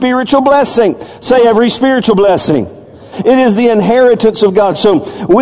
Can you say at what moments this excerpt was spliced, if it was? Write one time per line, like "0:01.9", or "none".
0:03.1